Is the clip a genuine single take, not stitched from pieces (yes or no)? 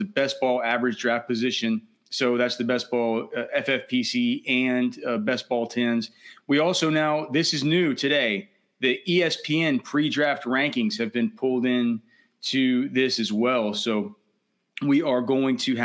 yes